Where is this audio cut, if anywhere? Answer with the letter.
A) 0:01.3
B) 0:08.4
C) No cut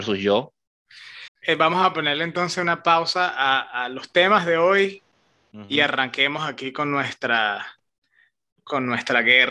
A